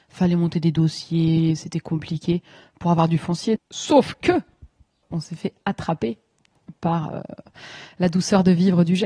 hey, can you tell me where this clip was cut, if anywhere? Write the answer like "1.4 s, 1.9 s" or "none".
3.6 s, 5.0 s